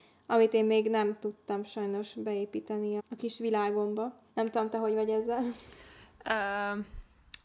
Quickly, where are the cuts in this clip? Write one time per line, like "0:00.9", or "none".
0:03.0
0:04.3